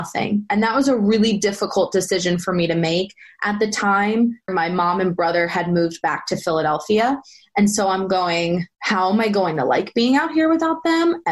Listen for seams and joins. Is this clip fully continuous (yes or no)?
no